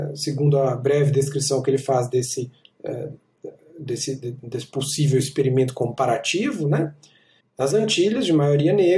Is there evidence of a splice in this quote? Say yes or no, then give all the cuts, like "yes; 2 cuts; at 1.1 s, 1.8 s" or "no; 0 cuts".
yes; 1 cut; at 7.4 s